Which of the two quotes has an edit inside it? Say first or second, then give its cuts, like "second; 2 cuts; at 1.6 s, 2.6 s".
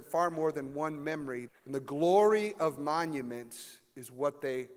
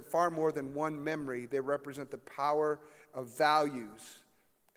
first; 1 cut; at 1.5 s